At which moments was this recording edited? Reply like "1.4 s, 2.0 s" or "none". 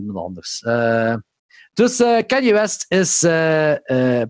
none